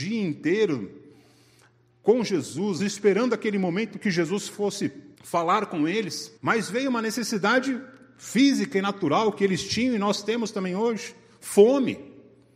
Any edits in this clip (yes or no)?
yes